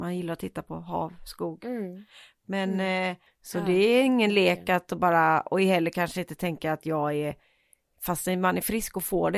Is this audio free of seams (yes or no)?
no